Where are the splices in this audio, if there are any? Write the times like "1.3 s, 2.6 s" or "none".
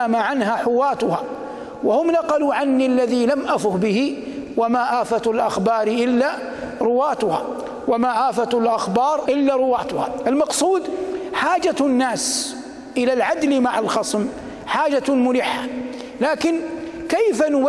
9.3 s